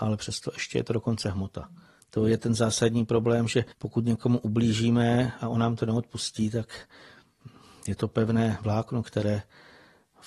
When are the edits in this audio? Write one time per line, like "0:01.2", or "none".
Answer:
0:02.0
0:03.7